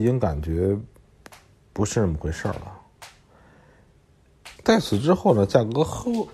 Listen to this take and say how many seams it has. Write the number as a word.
one